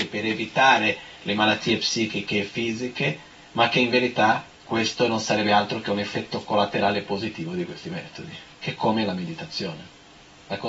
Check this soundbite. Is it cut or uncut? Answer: cut